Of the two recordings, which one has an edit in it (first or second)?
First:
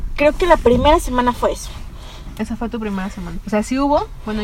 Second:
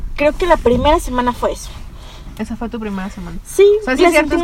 first